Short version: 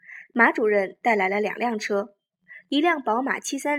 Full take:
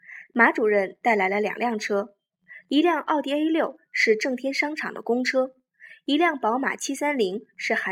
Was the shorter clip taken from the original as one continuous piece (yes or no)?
no